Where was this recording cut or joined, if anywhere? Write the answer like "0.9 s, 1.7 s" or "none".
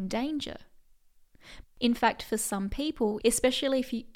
1.6 s, 3.2 s